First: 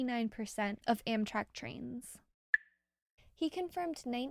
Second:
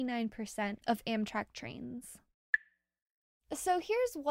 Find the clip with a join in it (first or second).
first